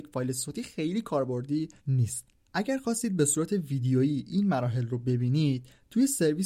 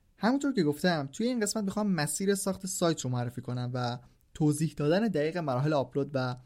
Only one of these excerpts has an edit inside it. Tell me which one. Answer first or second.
first